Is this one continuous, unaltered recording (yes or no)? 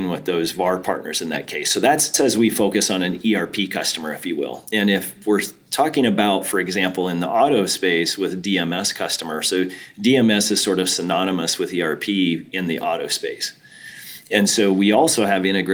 yes